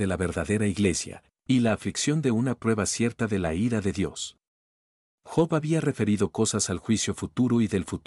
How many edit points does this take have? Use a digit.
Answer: 0